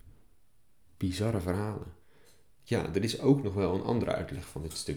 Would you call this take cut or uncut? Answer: cut